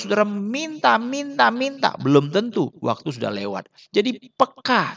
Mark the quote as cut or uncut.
uncut